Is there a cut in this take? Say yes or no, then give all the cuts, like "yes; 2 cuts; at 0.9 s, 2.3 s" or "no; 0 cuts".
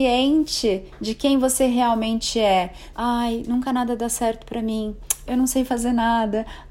yes; 2 cuts; at 2.9 s, 5.3 s